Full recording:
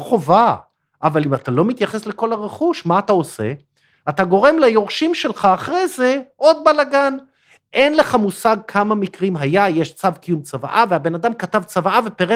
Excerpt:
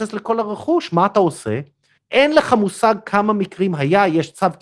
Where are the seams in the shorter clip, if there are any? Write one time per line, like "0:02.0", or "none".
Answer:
0:02.0